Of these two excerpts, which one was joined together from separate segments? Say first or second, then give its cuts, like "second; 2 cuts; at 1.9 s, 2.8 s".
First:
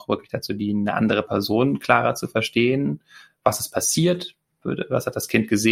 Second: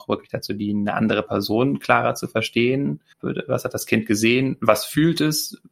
second; 1 cut; at 3.1 s